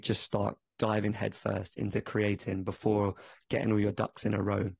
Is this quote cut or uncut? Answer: uncut